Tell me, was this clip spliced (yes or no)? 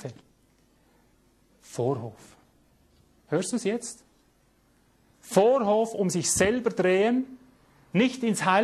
no